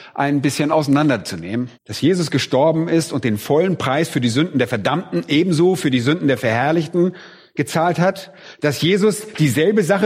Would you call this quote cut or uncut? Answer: cut